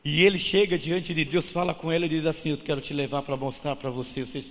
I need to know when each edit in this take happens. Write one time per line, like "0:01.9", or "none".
0:01.3